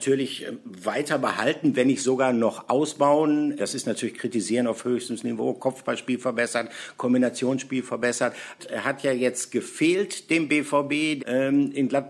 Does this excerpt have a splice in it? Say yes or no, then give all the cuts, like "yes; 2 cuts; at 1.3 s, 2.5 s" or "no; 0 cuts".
yes; 3 cuts; at 3.6 s, 8.6 s, 11.2 s